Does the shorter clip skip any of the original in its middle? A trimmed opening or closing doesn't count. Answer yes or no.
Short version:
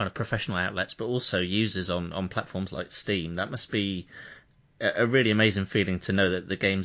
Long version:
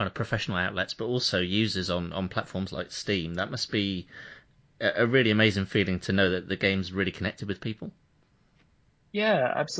no